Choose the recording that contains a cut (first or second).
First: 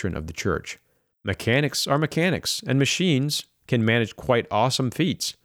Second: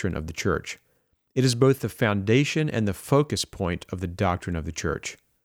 first